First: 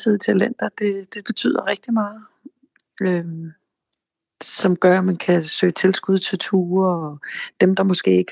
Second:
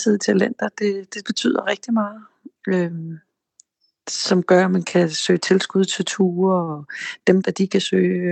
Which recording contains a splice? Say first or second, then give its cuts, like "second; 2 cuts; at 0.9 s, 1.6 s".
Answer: second; 2 cuts; at 2.6 s, 7.4 s